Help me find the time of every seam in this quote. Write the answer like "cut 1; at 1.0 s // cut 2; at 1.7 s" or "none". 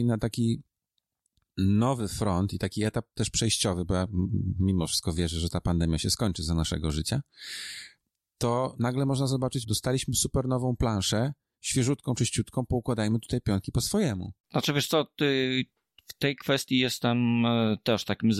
cut 1; at 9.6 s // cut 2; at 14.4 s